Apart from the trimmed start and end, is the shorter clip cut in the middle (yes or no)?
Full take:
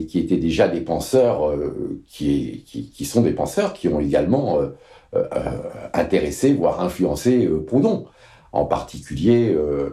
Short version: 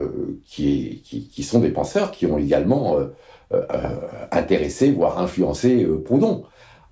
no